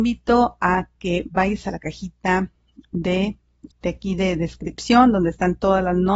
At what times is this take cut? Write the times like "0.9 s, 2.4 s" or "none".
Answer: 3.7 s